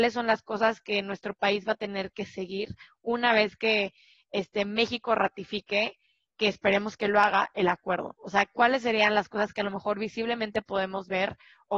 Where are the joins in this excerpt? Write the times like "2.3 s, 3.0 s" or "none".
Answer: none